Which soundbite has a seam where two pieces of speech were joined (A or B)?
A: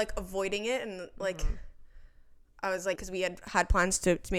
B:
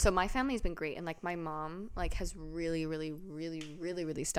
A